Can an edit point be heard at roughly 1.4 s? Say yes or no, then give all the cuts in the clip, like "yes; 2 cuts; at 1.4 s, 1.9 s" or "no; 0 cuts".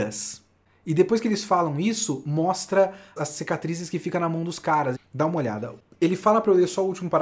no; 2 cuts; at 3.2 s, 4.9 s